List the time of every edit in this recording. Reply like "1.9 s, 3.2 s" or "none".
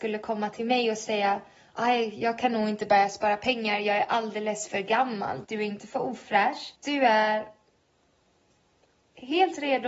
5.4 s, 6.8 s